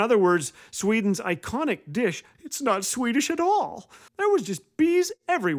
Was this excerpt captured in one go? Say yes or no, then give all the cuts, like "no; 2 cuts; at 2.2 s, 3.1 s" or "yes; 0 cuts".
no; 2 cuts; at 2.3 s, 4.1 s